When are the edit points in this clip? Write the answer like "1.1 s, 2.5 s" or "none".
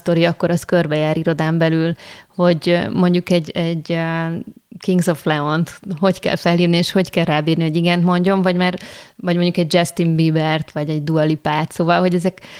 none

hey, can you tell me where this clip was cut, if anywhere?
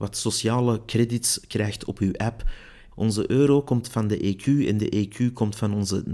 2.9 s

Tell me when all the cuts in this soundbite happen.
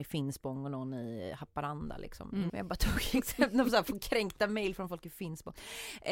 2.5 s

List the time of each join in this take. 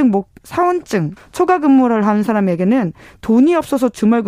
1.2 s

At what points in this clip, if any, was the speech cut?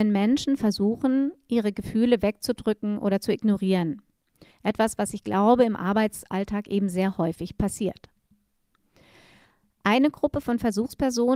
4.5 s

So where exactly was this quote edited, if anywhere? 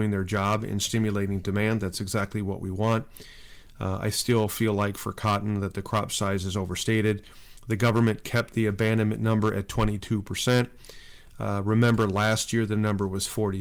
none

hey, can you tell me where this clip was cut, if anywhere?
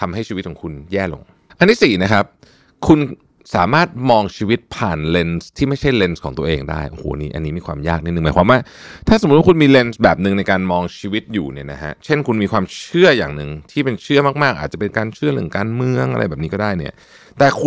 none

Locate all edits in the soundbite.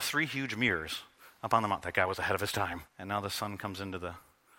2.9 s

